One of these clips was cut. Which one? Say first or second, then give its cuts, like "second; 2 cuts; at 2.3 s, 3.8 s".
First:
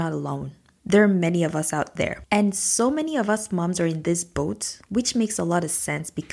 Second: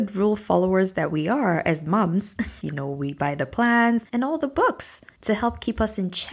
second; 2 cuts; at 2.6 s, 4.1 s